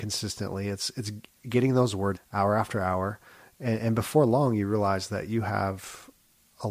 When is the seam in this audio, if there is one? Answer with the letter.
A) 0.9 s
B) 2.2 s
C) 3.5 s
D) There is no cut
B